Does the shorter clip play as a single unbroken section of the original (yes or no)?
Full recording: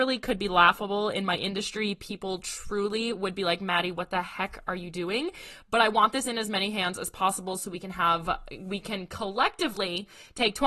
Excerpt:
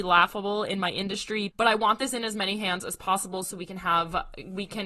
no